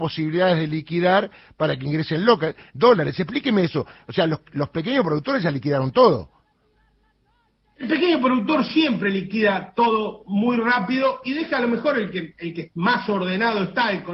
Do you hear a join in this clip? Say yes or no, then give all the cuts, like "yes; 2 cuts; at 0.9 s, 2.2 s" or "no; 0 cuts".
no; 0 cuts